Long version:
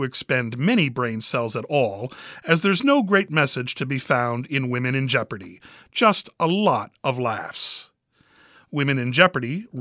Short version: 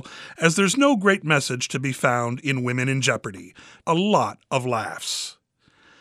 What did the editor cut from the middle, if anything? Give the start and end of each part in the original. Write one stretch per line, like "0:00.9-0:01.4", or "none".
0:05.9-0:06.3